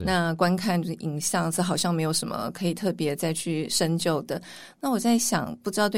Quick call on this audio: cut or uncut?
cut